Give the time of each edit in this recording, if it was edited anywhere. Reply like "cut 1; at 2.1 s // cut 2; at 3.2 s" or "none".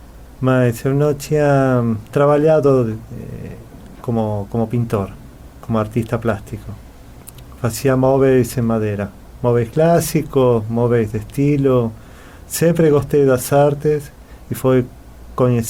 none